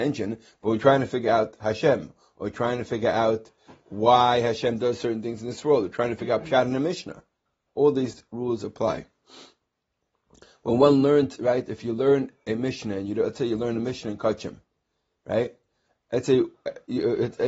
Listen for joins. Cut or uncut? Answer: uncut